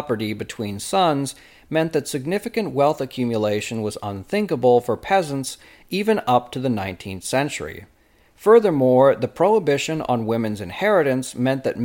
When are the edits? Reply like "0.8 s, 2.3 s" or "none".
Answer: none